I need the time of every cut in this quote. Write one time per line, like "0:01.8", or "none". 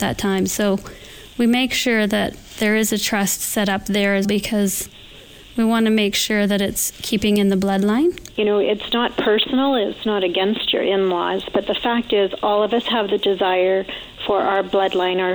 0:04.2